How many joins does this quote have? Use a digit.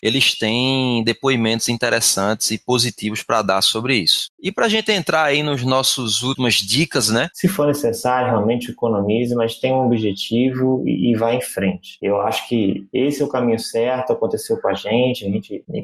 1